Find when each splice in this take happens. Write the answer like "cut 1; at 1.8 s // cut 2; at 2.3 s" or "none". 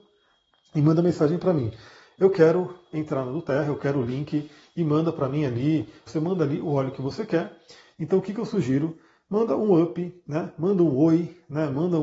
cut 1; at 6.1 s // cut 2; at 7.9 s